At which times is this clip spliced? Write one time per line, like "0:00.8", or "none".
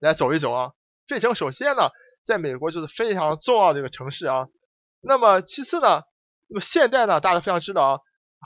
0:00.9

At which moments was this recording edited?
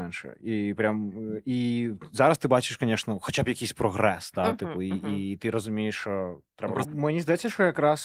0:06.8

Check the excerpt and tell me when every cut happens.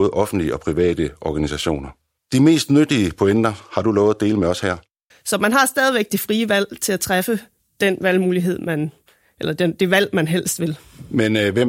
0:05.1

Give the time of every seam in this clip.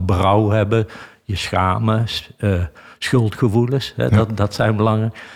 none

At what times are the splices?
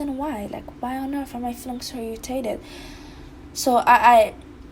none

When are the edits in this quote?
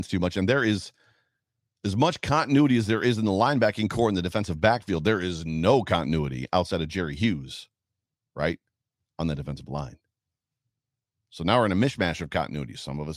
none

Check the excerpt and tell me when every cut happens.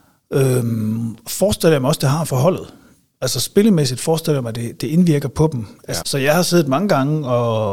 0:04.8
0:06.0

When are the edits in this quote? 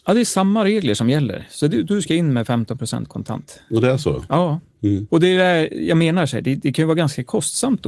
none

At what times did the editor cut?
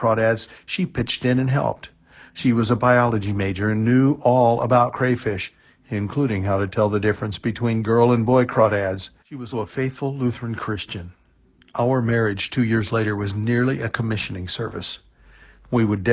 0:09.5

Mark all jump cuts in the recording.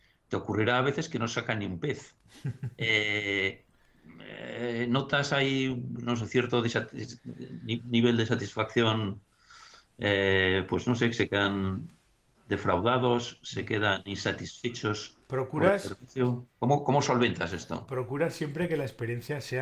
none

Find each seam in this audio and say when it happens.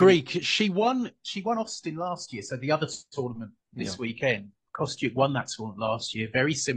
none

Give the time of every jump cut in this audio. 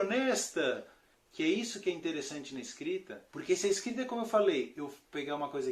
0:01.1
0:03.3

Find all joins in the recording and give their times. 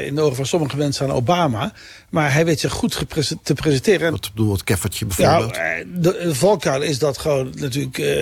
0:04.1

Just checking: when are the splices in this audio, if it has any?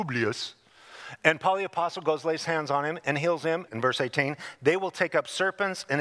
0:03.7

